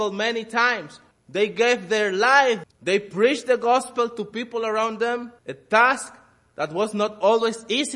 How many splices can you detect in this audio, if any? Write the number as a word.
three